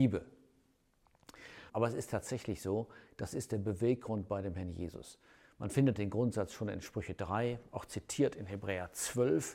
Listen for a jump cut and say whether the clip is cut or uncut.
cut